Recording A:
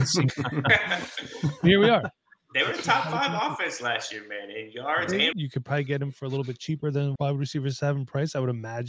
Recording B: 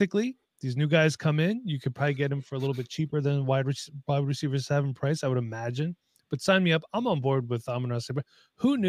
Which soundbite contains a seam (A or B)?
A